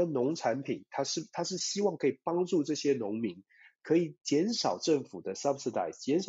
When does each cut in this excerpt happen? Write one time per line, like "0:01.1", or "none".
none